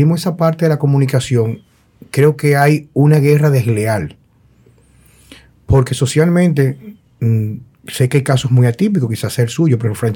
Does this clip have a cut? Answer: yes; 1 cut; at 7.0 s

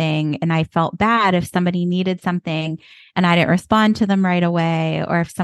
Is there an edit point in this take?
no; 0 cuts

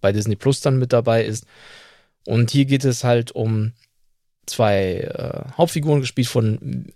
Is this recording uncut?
yes; 0 cuts

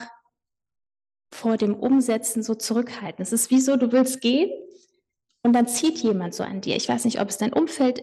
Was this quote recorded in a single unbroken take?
yes; 0 cuts

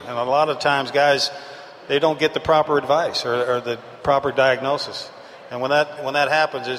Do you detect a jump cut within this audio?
no; 0 cuts

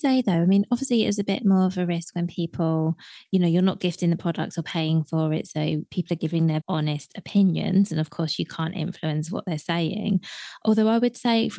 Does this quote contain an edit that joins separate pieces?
yes; 1 cut; at 6.6 s

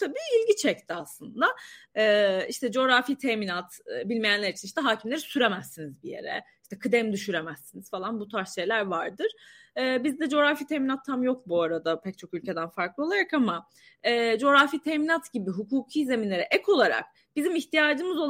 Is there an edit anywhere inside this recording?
yes; 1 cut; at 1.9 s

